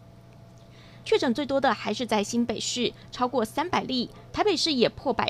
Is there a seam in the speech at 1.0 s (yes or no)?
yes